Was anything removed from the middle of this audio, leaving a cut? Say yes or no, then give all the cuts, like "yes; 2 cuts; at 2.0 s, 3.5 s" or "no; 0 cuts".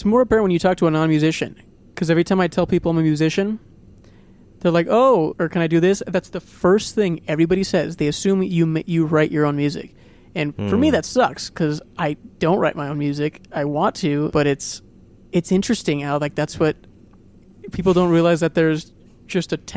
yes; 1 cut; at 5.3 s